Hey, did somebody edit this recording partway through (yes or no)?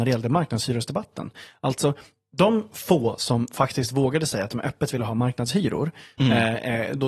no